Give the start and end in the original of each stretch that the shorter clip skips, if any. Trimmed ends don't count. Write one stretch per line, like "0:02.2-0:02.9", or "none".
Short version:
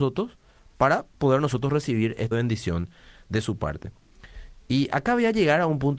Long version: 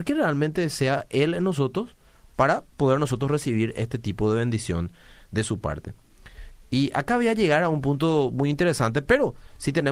0:03.9-0:04.3